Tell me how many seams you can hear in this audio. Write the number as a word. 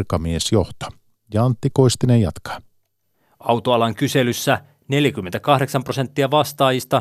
zero